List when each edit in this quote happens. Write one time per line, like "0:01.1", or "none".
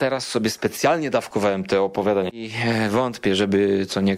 0:02.3